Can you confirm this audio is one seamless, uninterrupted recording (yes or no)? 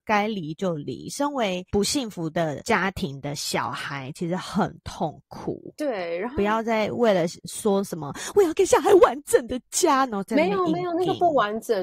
yes